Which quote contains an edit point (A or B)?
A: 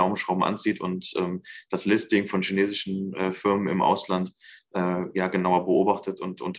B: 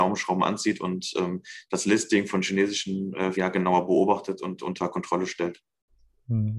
B